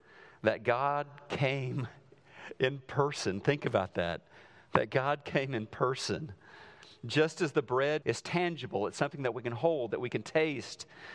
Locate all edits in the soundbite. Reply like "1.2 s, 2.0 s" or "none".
8.0 s, 9.9 s